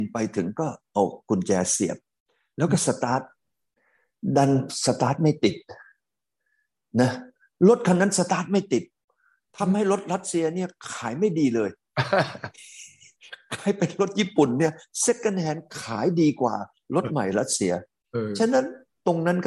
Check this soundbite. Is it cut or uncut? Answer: uncut